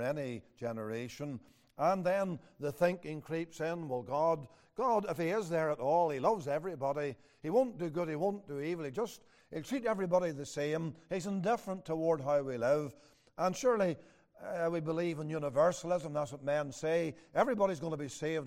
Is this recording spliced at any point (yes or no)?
no